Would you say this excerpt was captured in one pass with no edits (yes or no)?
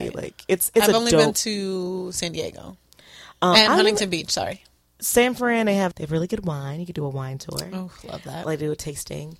yes